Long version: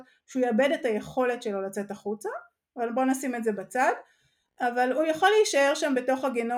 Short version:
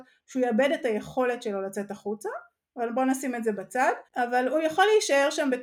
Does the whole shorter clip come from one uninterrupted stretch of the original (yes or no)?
no